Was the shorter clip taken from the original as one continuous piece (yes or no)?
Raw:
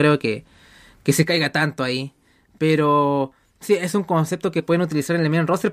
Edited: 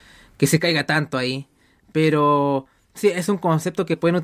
yes